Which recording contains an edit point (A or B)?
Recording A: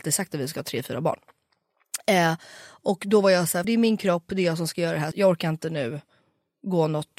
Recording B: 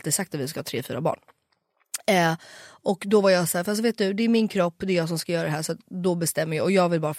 A